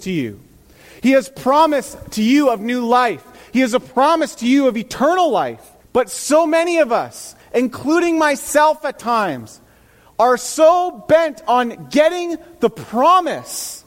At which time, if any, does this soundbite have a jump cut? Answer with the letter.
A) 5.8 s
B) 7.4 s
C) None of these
A